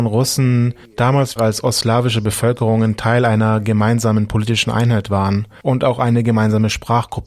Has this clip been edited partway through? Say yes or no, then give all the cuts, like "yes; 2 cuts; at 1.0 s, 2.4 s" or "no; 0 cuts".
yes; 1 cut; at 1.4 s